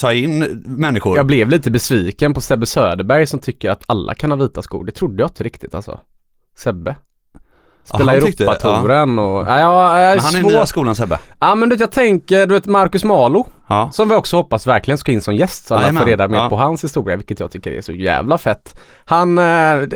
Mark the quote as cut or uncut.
uncut